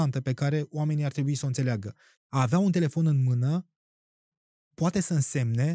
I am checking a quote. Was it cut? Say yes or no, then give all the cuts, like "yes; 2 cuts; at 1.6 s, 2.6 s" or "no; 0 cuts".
yes; 1 cut; at 2.2 s